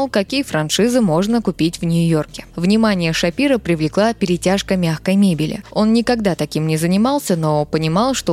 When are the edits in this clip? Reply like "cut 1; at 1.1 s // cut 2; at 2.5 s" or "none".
none